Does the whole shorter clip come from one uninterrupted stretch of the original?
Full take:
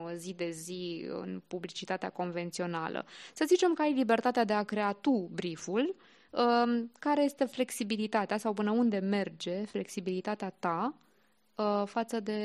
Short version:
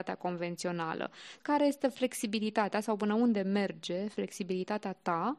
no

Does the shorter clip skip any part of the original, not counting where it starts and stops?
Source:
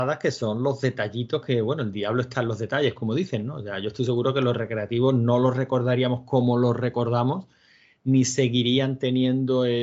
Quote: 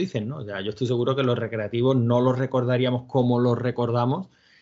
no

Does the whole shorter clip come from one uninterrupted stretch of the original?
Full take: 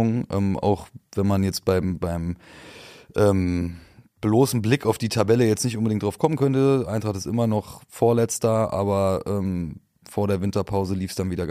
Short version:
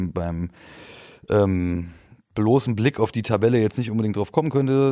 yes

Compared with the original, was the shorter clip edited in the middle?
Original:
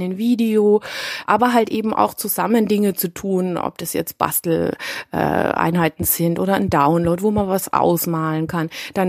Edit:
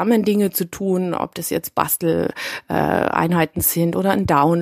no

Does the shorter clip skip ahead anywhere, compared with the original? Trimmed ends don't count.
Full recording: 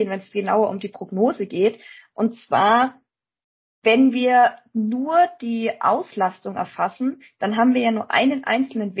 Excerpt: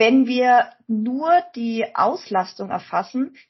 no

